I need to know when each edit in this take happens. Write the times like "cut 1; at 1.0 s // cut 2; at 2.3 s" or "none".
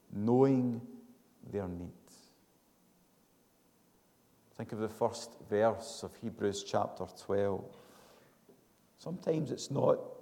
cut 1; at 9.0 s

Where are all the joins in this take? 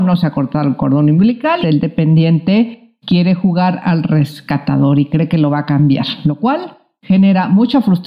cut 1; at 1.6 s

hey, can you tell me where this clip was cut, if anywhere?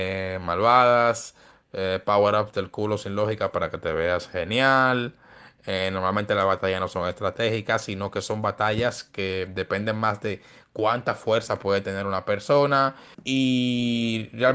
cut 1; at 13.1 s

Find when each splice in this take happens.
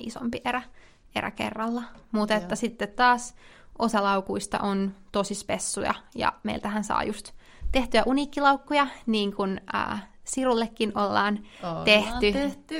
none

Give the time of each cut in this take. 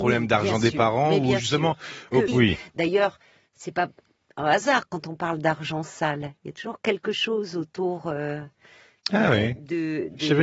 cut 1; at 2.3 s

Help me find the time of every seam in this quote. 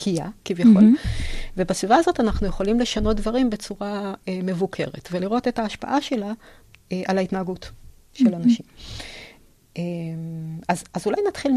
none

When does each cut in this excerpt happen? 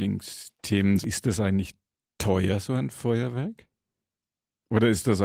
none

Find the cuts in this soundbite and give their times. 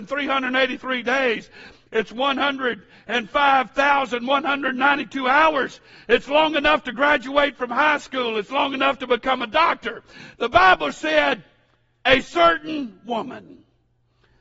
cut 1; at 10.4 s

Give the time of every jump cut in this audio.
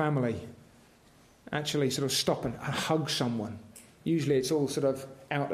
none

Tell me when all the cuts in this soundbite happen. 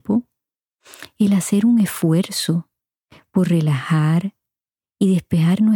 none

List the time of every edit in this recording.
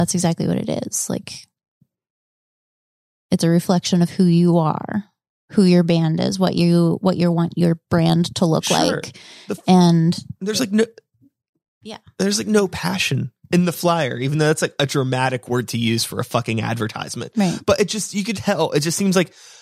cut 1; at 18.3 s

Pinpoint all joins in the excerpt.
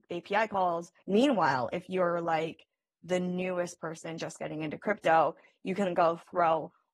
cut 1; at 1.0 s

